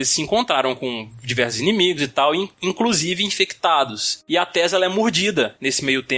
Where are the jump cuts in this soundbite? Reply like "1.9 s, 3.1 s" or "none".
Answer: none